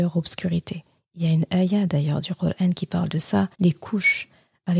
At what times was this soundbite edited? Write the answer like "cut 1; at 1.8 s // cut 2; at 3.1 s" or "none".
cut 1; at 3.5 s